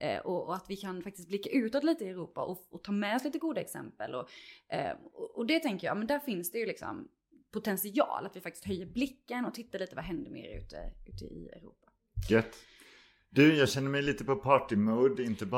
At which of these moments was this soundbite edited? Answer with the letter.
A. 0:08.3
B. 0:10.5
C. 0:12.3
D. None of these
D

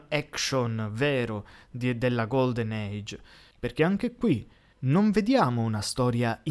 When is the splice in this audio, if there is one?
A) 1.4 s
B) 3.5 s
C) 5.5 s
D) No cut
B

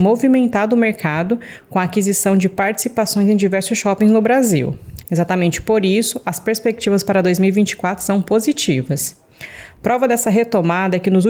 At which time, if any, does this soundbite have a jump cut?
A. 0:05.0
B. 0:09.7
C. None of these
A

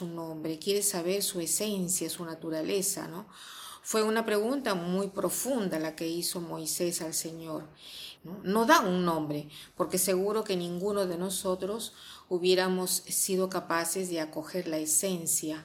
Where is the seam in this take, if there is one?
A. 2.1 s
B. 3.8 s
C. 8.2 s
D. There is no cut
C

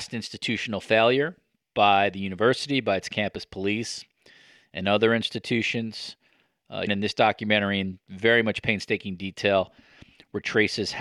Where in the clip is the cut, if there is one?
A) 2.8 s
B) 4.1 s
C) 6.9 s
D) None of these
C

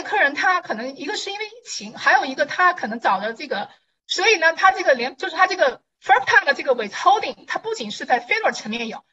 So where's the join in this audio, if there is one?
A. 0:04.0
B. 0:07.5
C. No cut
A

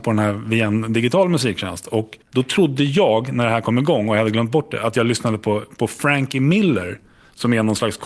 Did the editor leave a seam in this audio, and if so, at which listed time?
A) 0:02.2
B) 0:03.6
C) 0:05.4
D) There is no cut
A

